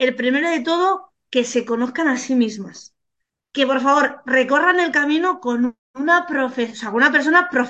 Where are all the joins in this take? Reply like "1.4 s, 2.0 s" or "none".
3.4 s